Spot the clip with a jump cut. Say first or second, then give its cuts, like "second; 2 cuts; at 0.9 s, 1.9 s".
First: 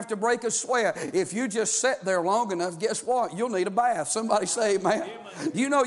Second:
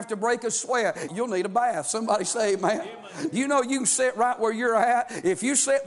second; 1 cut; at 1.1 s